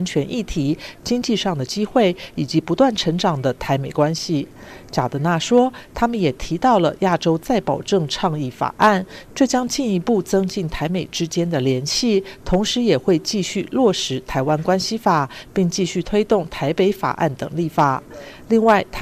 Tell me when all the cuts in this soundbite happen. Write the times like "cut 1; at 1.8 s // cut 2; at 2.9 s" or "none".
none